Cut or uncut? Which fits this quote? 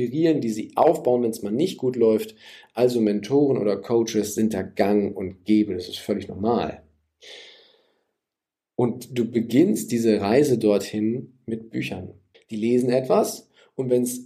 cut